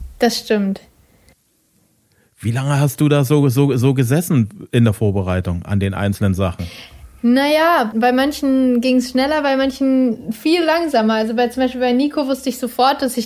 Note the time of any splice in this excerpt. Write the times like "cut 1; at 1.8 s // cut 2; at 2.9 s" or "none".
cut 1; at 7.9 s